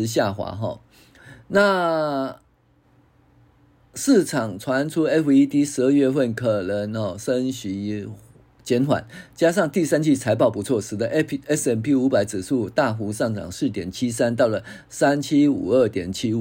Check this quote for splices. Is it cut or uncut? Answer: uncut